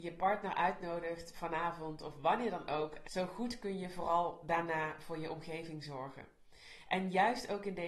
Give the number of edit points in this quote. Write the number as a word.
one